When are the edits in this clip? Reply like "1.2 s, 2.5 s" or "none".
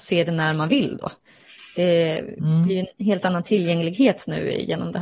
none